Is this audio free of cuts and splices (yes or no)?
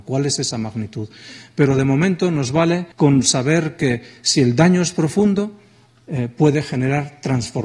no